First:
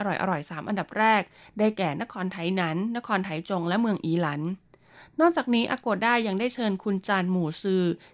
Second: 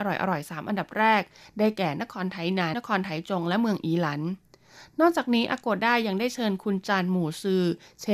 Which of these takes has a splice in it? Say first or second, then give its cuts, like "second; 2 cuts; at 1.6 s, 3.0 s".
second; 1 cut; at 2.7 s